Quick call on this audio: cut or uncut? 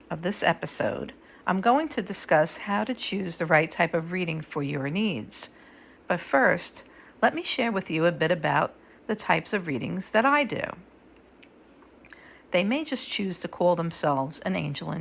cut